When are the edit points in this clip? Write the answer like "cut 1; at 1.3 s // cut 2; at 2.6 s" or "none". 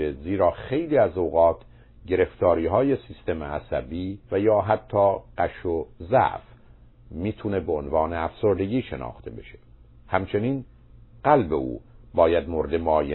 cut 1; at 4.2 s